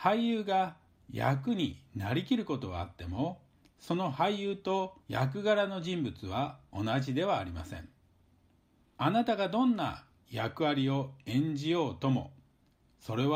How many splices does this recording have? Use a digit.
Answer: 1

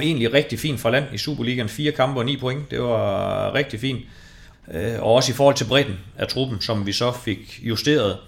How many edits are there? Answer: 1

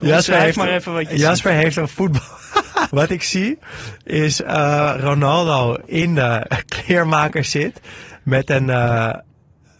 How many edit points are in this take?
1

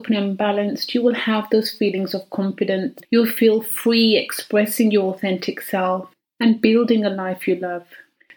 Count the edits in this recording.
0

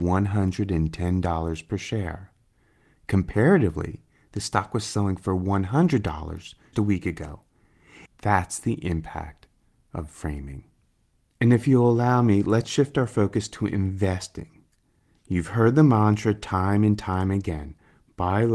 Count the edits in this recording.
2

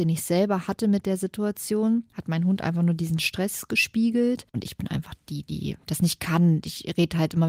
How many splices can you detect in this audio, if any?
1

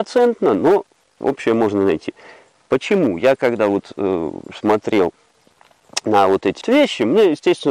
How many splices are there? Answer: 2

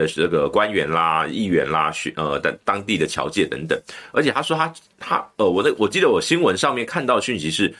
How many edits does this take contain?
0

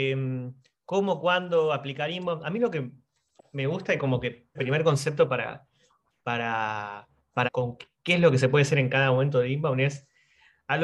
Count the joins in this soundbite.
2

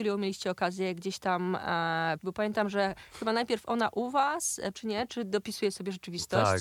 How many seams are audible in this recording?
2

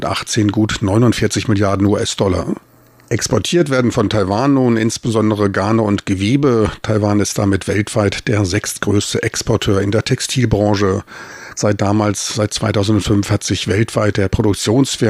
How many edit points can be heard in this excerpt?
1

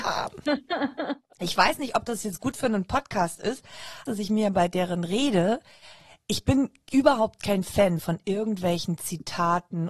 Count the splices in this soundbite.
2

